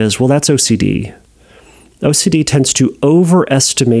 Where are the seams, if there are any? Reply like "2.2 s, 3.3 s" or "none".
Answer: none